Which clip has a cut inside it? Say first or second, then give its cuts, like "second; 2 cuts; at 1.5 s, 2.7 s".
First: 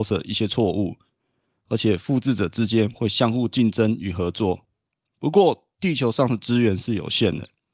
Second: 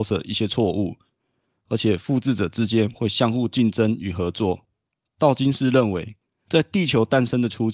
first; 1 cut; at 5.1 s